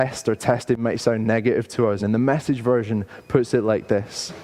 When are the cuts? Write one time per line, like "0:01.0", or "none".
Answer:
0:02.0